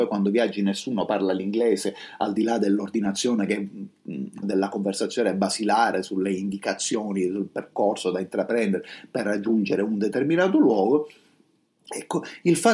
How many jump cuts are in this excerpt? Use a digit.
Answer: 1